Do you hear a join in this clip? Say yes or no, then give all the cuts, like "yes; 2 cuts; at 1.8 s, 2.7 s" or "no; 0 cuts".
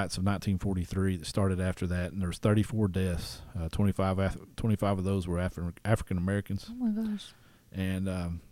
no; 0 cuts